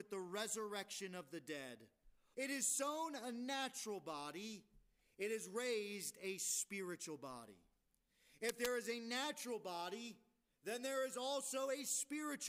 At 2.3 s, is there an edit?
yes; 1 cut; at 2.3 s

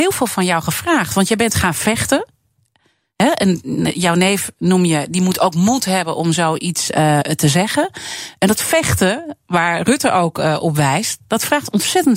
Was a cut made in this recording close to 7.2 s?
yes; 1 cut; at 7.2 s

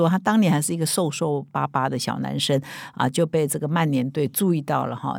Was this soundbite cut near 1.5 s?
no; 0 cuts

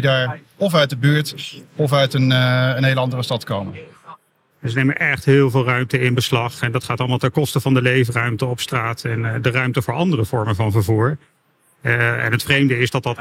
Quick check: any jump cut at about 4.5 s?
yes; 1 cut; at 4.5 s

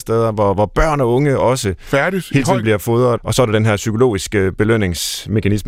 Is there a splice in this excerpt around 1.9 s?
no; 1 cut; at 3.2 s

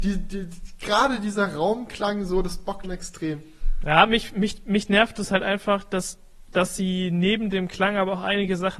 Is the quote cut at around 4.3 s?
no; 1 cut; at 2.8 s

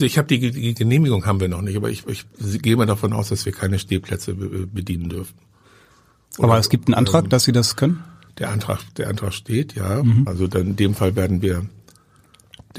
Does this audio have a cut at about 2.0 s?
yes; 2 cuts; at 2.0 s, 10.3 s

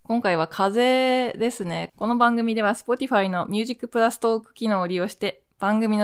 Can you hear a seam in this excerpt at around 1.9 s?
yes; 1 cut; at 1.9 s

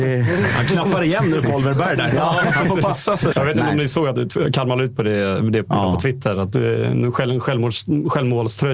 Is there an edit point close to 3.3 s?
yes; 1 cut; at 3.3 s

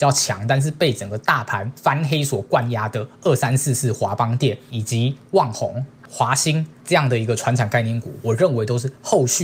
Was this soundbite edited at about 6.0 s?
no; 0 cuts

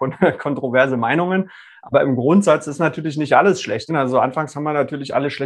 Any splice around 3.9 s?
yes; 1 cut; at 3.9 s

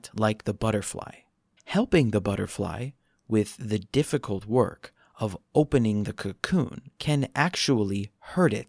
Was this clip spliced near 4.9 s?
no; 2 cuts; at 1.6 s, 6.9 s

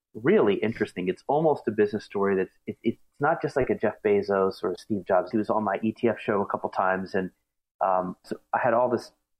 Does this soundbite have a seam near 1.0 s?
no; 2 cuts; at 5.3 s, 8.2 s

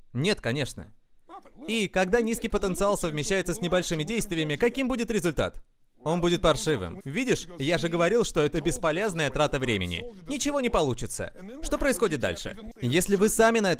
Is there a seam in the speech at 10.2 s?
no; 2 cuts; at 7.0 s, 12.7 s

